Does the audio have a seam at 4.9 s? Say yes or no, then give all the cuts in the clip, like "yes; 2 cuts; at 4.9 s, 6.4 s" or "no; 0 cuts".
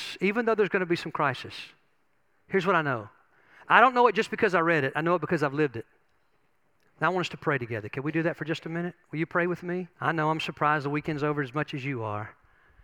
no; 2 cuts; at 6.9 s, 9.9 s